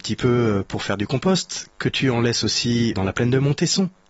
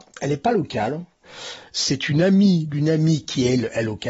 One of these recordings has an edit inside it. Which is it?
first; 2 cuts; at 1.7 s, 2.9 s

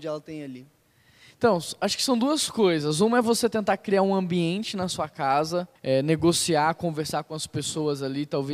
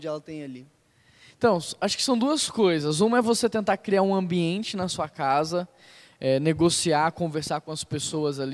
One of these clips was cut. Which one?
first; 1 cut; at 5.8 s

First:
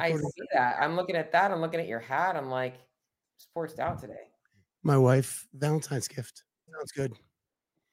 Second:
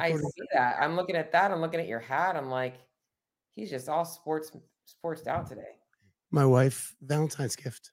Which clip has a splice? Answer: first; 2 cuts; at 3.2 s, 6.7 s

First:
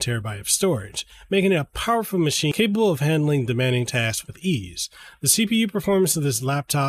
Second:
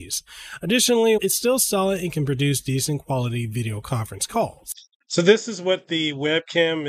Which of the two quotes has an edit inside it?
second; 1 cut; at 1.2 s

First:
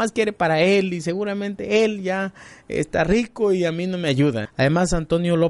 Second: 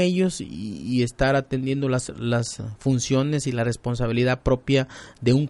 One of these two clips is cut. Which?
first; 1 cut; at 4.4 s

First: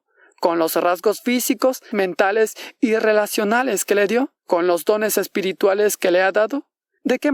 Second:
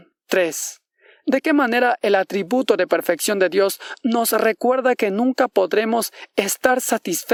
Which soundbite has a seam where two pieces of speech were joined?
first; 2 cuts; at 1.9 s, 4.4 s

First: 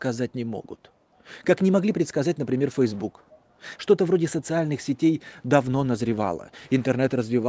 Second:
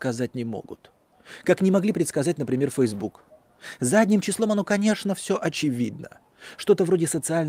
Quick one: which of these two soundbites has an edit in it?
first; 1 cut; at 3.8 s

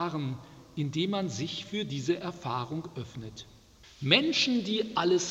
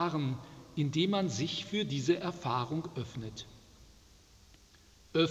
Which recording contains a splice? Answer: first; 1 cut; at 3.8 s

